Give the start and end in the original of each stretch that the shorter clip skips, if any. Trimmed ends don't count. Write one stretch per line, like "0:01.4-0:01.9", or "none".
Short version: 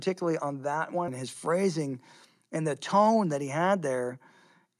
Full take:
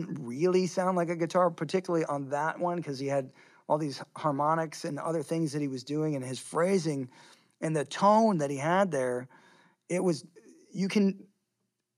0:02.7-0:06.2